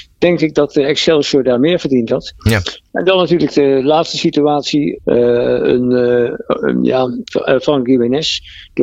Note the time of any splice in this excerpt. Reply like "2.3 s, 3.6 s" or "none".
5.0 s, 7.3 s